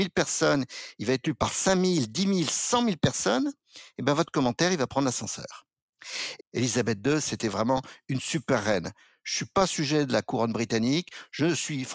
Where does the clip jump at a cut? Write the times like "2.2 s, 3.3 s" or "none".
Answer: 6.4 s